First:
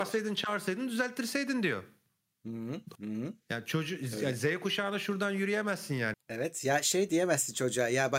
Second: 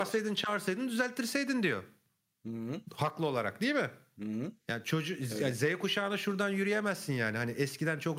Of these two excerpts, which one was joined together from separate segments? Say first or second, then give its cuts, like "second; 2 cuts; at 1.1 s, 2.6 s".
first; 2 cuts; at 3.0 s, 6.1 s